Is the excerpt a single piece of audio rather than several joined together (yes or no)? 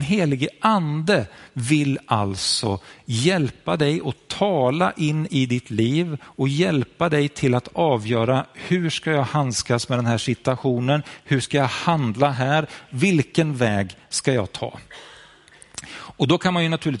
yes